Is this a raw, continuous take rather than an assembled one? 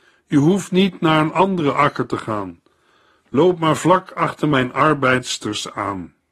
yes; 0 cuts

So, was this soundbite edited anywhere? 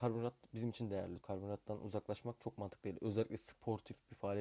yes; 1 cut; at 1.2 s

